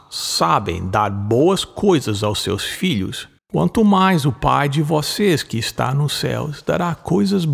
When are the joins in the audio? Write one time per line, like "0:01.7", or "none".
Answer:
0:03.4